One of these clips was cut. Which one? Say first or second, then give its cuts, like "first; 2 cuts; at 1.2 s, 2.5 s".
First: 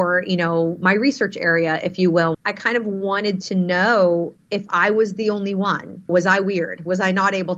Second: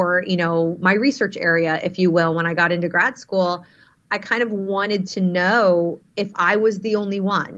first; 2 cuts; at 2.3 s, 6.1 s